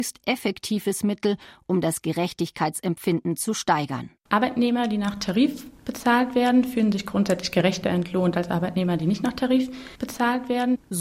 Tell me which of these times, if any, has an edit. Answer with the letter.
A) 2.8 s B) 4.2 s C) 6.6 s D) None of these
D